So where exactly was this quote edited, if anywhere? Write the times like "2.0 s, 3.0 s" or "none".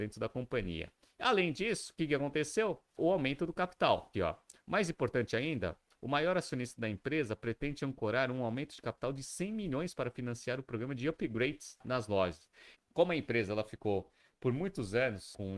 4.1 s, 12.7 s